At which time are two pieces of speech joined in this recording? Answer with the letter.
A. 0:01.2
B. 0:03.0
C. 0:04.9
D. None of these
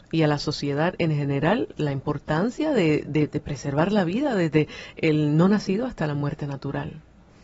D